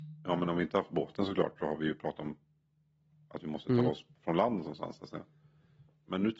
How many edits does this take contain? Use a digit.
0